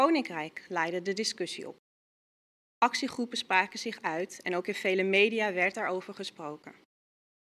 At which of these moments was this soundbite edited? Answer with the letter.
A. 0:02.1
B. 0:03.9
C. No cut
C